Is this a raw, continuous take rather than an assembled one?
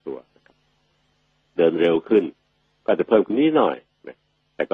no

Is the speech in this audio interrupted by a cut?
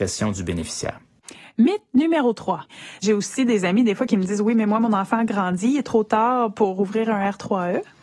no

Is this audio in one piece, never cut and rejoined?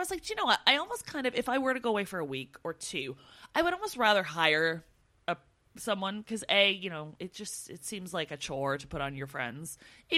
yes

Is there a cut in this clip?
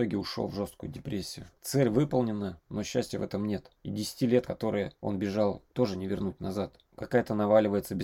no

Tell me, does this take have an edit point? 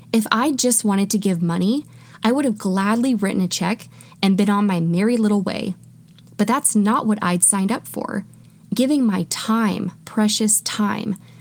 yes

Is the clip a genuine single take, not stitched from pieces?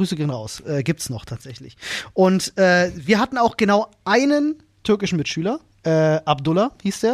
yes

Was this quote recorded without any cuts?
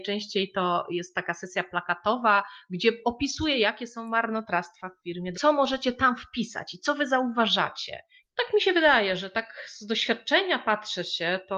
no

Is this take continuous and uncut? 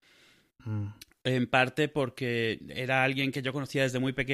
yes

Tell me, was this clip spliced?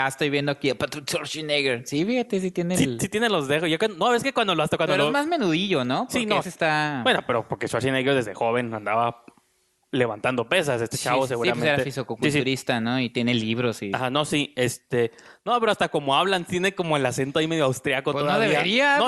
yes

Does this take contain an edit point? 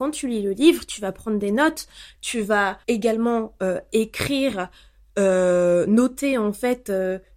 yes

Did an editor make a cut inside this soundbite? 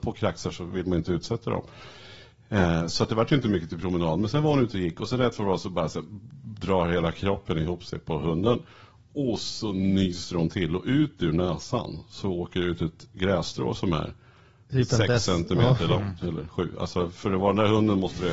no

